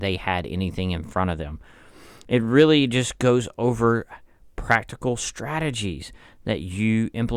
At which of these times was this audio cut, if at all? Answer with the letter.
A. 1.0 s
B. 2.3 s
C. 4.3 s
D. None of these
D